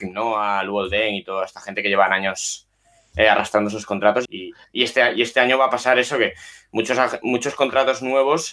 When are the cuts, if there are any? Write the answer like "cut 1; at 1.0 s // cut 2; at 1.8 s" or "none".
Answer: cut 1; at 4.3 s